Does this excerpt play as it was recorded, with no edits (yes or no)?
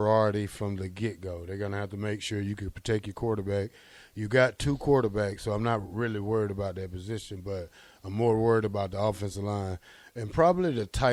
yes